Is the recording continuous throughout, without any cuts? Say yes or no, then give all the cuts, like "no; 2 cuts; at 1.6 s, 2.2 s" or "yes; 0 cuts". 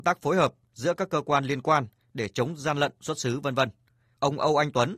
yes; 0 cuts